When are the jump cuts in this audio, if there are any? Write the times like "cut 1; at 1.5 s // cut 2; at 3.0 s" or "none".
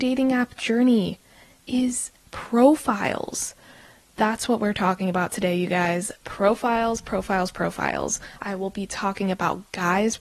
cut 1; at 8.4 s